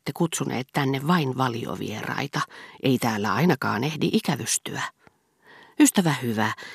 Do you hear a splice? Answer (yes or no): no